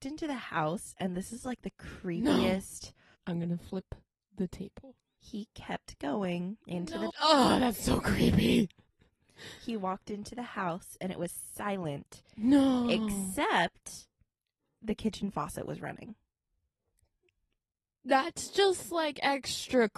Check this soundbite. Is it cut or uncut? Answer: cut